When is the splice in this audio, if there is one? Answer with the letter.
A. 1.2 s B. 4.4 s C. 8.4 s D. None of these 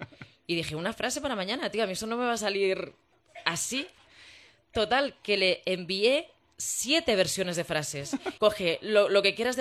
C